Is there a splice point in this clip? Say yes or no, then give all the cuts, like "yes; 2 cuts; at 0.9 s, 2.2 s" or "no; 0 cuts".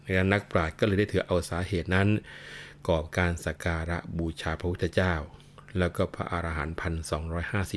yes; 1 cut; at 3.6 s